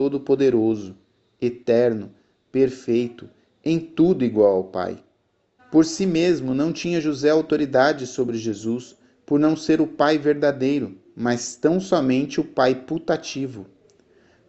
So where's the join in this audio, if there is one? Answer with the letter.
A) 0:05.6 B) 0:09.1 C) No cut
A